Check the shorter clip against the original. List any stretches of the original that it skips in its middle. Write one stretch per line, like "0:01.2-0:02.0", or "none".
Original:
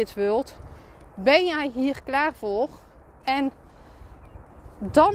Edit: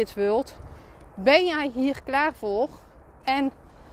none